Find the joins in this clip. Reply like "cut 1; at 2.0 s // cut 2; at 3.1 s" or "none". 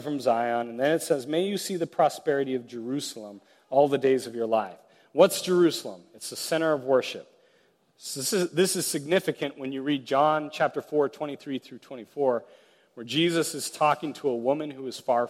none